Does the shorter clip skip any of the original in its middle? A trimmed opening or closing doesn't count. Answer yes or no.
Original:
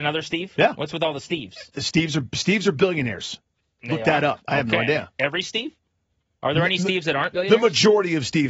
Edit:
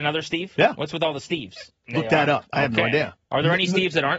yes